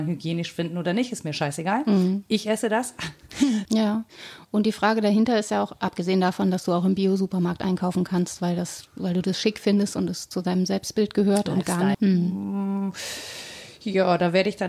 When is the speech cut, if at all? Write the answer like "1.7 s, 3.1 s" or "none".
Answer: 3.7 s, 11.9 s